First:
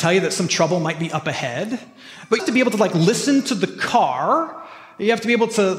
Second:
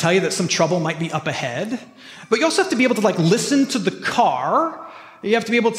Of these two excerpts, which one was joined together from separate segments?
first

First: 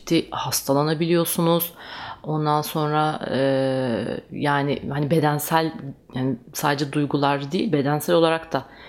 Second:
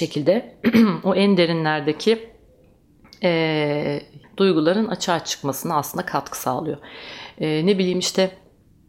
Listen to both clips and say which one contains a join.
second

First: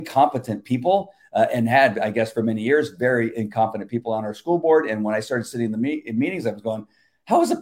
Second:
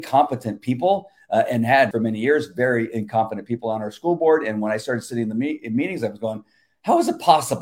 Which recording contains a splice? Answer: second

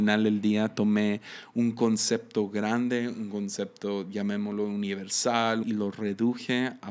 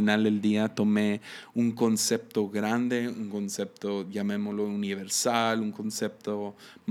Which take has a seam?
first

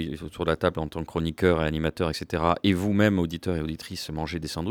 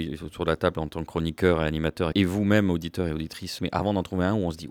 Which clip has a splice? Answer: second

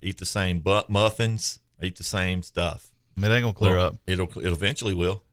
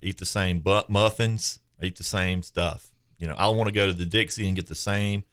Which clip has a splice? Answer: first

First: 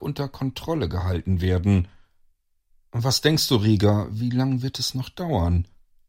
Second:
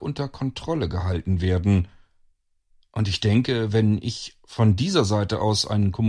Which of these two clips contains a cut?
first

